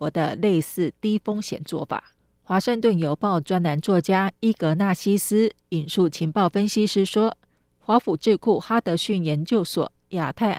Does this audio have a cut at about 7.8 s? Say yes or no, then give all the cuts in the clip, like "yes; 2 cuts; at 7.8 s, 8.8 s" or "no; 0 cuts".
yes; 1 cut; at 7.8 s